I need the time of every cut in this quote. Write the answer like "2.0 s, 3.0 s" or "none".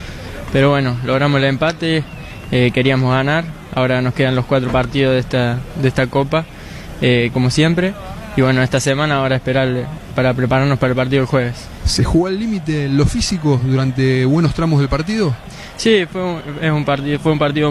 7.3 s